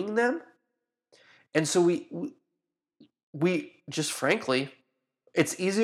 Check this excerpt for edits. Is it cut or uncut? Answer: uncut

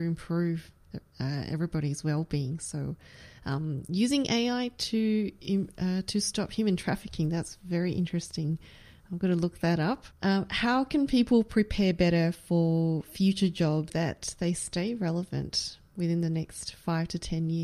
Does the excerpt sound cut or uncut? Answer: cut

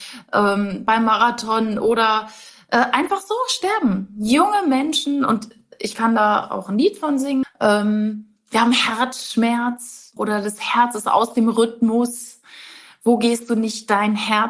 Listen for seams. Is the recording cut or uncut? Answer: cut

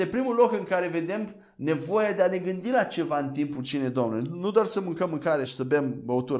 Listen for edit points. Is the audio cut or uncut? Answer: cut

